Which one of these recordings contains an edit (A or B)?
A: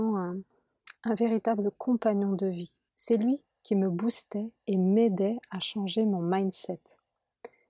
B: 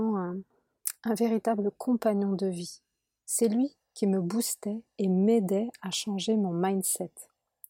A